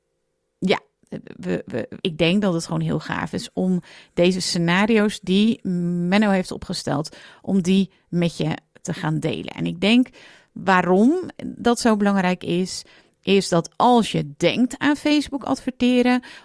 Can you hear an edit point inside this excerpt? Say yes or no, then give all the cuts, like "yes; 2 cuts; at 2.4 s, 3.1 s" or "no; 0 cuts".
yes; 1 cut; at 2.0 s